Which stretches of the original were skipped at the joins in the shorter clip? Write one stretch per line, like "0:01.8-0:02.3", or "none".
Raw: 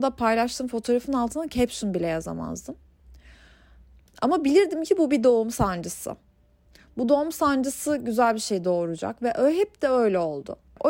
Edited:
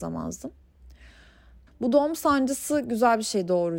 0:03.9-0:06.8